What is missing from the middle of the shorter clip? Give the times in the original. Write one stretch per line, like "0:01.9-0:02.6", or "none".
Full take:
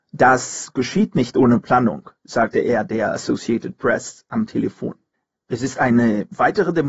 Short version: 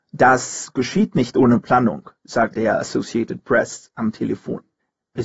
0:02.5-0:02.8